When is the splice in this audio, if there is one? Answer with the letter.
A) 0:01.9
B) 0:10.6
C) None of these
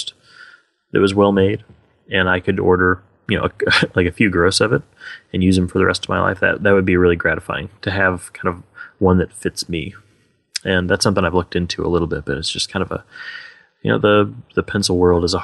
C